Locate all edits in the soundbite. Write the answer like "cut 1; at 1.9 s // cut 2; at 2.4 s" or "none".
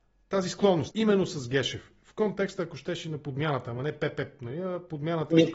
cut 1; at 0.9 s